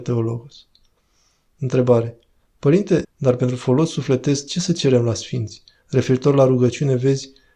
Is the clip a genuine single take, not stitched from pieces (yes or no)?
no